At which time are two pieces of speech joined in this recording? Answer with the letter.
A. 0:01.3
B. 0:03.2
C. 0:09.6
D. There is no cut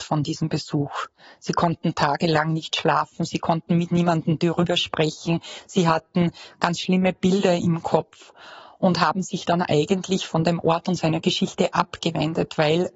D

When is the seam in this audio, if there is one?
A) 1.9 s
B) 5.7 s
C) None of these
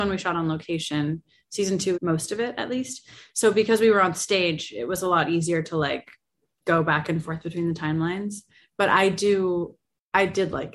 A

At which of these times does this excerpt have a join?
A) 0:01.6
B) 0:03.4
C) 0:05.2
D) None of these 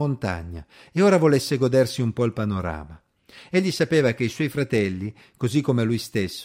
D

